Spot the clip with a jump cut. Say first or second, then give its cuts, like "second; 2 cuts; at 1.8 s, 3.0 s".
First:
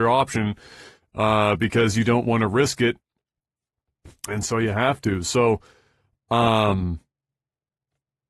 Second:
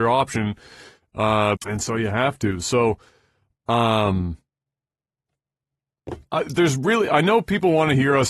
second; 1 cut; at 1.6 s